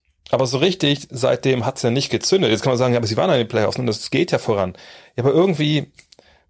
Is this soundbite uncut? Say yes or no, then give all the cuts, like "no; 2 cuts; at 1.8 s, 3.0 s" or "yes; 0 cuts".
yes; 0 cuts